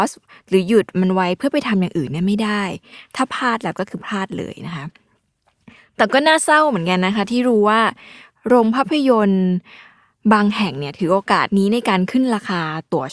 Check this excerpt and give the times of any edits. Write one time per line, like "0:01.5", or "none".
none